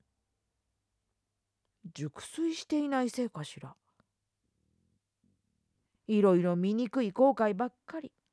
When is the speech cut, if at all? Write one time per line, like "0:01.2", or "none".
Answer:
0:05.9